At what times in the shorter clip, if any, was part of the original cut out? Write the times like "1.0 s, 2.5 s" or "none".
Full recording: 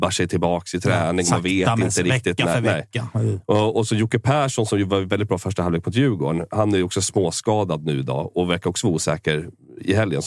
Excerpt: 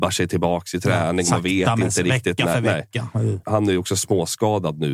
3.4 s